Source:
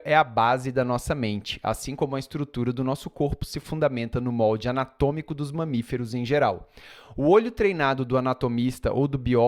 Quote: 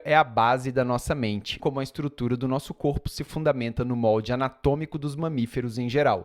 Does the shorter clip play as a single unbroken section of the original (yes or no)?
no